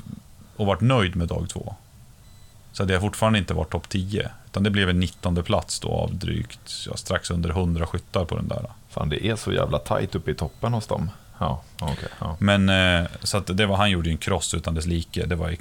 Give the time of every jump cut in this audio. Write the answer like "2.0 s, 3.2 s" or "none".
11.3 s

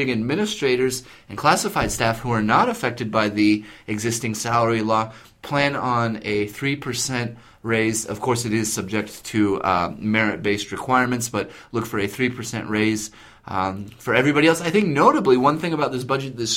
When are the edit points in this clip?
none

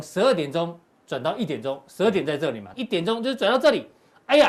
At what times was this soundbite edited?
2.7 s

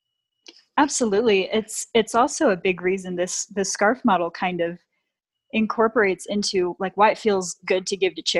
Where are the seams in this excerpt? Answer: none

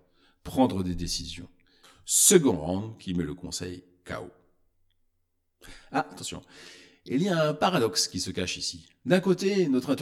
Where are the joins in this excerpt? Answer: 1.8 s

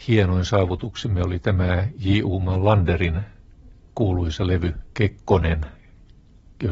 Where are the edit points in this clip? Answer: none

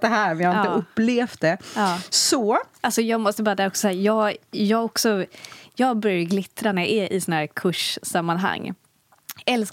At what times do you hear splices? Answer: none

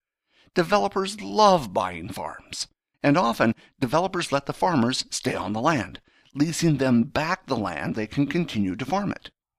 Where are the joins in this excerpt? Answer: 2.9 s, 7.9 s

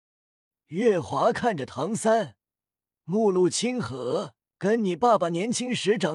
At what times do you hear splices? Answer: none

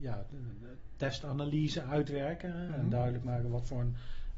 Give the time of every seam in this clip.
none

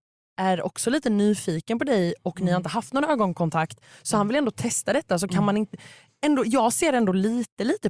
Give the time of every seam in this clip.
none

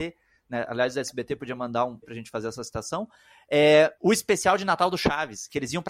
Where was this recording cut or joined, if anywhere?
2.0 s

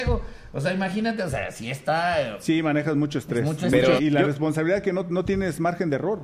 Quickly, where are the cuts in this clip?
4.0 s

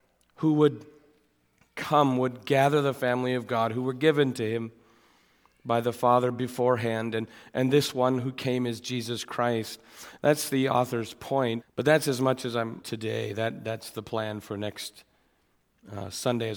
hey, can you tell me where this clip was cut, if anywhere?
11.6 s, 12.8 s

